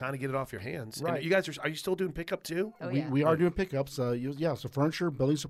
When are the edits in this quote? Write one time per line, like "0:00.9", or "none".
none